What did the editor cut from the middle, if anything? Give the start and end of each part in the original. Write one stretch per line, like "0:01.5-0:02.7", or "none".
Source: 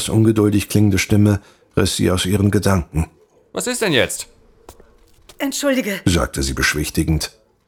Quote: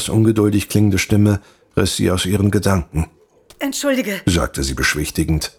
0:03.5-0:05.3